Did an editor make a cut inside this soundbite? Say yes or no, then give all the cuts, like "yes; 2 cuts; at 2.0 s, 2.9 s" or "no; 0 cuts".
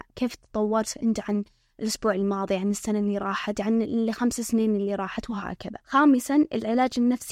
yes; 1 cut; at 5.8 s